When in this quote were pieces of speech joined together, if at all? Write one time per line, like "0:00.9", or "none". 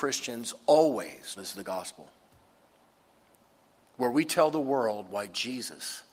0:01.4